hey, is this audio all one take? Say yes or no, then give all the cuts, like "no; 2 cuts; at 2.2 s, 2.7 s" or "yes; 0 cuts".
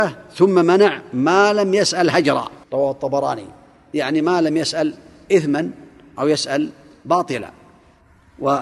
no; 1 cut; at 2.6 s